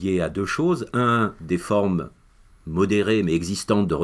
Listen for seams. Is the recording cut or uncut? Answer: uncut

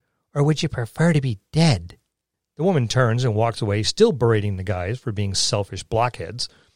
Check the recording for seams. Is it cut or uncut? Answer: uncut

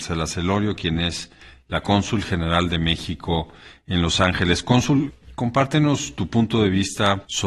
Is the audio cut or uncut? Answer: uncut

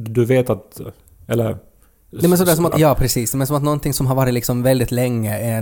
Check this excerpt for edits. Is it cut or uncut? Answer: cut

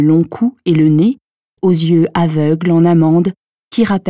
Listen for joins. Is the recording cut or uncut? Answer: cut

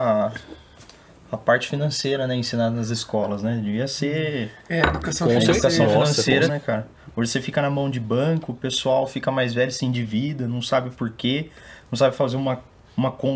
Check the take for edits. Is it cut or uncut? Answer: cut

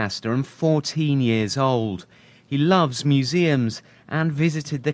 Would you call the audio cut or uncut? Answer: uncut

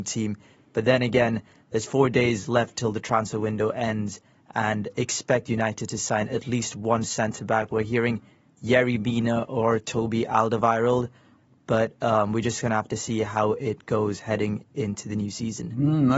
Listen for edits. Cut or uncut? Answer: uncut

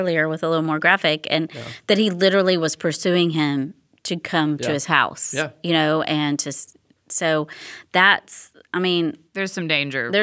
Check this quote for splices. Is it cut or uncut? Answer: uncut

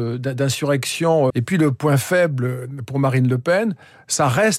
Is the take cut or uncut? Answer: cut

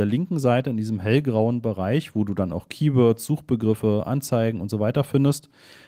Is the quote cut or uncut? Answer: uncut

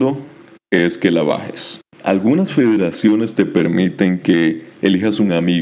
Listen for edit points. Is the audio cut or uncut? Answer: cut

